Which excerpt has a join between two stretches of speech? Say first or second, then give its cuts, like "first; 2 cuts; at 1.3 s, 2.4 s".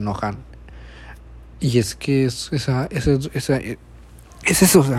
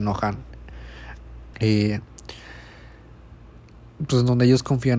second; 1 cut; at 1.5 s